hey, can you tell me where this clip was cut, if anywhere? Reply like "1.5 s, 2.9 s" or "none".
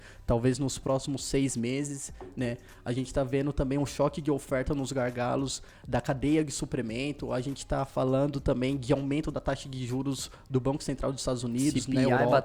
none